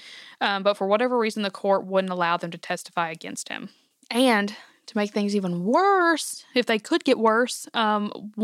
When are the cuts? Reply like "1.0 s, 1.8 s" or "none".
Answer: 4.0 s